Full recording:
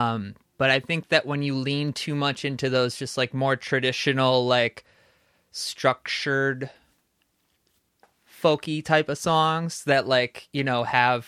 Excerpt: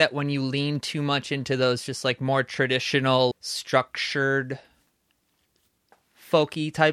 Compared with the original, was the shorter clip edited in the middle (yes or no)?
yes